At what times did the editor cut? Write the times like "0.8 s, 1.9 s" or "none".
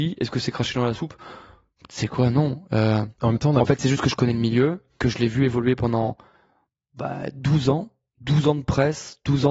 none